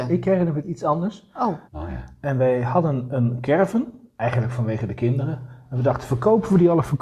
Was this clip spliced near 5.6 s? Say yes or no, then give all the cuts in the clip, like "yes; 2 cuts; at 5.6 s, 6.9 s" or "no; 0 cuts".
no; 1 cut; at 1.7 s